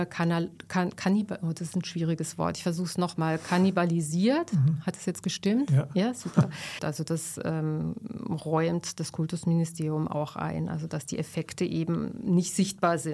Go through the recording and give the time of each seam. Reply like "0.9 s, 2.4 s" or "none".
6.8 s